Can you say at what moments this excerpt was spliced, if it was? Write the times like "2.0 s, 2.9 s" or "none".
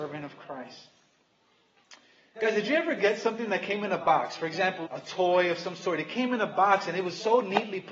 4.9 s